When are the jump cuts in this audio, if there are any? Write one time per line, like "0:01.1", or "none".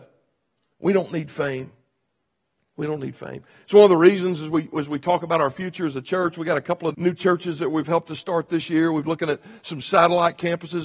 0:06.9

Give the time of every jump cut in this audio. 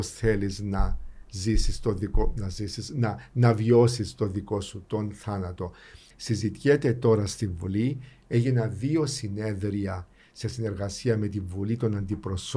0:06.1

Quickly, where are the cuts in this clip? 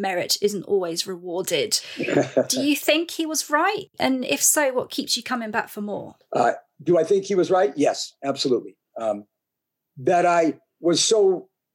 none

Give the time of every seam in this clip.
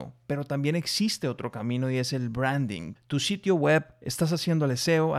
0:03.0

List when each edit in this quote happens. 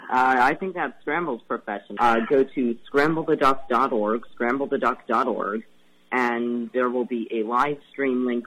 0:02.0

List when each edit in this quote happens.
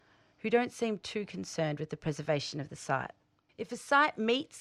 0:03.5

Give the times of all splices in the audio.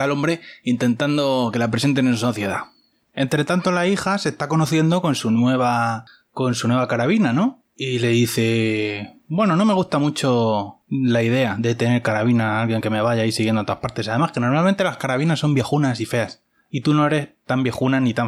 none

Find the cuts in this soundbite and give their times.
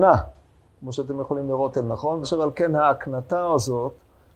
0:02.2

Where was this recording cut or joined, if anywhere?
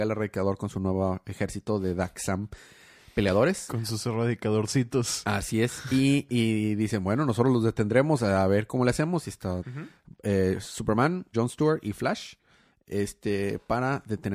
0:09.6
0:11.3

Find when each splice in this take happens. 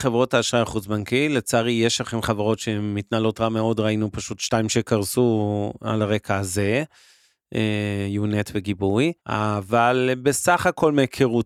0:09.2

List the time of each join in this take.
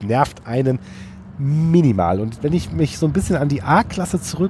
none

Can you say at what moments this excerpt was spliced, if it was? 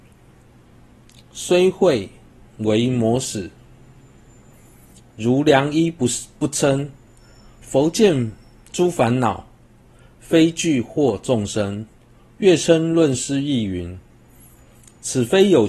none

